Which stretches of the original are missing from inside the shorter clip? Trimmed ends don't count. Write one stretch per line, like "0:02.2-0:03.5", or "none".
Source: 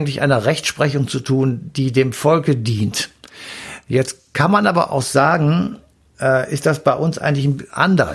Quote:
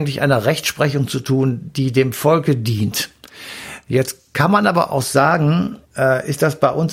0:05.8-0:06.1

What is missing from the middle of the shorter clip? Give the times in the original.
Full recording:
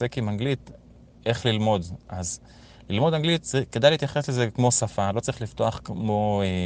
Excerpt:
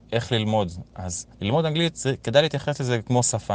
0:02.5-0:02.8

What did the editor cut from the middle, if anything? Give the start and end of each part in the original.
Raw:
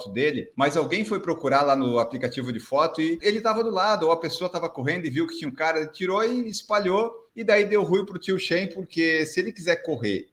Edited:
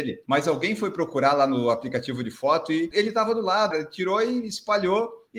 0:04.0-0:05.7

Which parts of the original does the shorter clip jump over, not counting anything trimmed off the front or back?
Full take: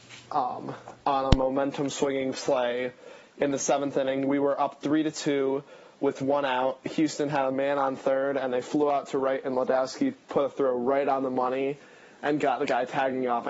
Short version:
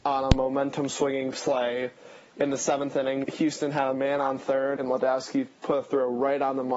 0:04.2-0:06.8
0:08.3-0:09.4

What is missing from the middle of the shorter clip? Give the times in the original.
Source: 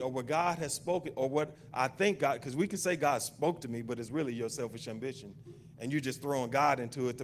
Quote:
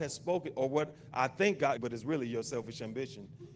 0:02.4-0:03.8

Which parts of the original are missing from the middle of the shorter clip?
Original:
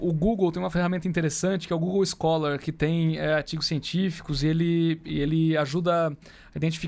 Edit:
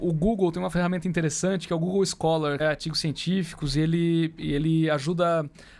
0:02.6-0:03.3

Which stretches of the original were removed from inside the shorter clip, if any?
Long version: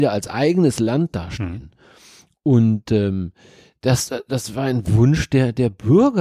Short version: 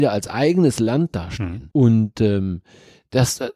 0:01.7-0:02.4

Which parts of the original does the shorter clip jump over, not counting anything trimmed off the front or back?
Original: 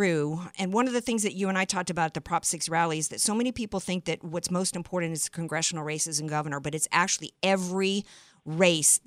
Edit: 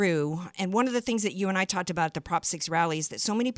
none

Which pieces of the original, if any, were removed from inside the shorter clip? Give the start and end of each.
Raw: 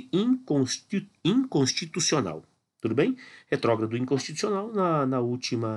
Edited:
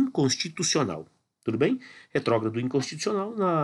none

